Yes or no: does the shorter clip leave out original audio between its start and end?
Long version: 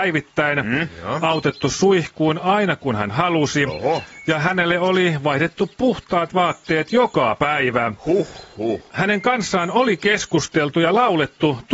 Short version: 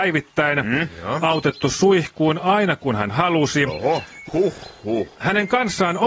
yes